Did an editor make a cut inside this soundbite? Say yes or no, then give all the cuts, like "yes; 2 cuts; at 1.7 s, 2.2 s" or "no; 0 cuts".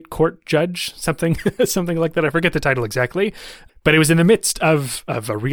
no; 0 cuts